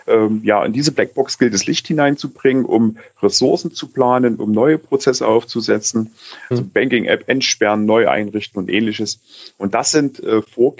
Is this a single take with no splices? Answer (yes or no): no